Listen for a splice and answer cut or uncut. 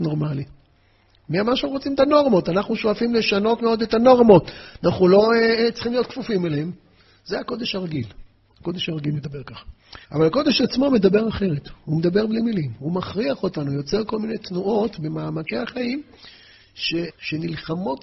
cut